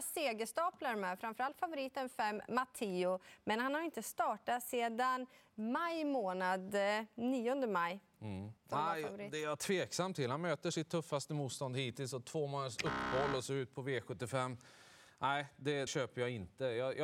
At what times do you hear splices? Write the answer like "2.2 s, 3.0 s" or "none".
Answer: 8.6 s, 15.9 s